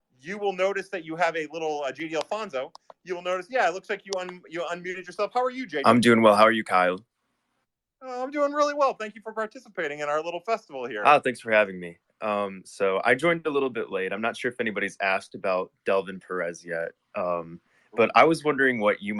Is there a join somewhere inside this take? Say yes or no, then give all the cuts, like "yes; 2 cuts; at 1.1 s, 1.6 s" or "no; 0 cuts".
no; 0 cuts